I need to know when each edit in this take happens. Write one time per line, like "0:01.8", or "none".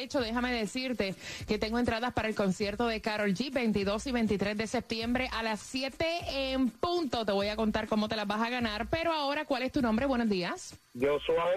none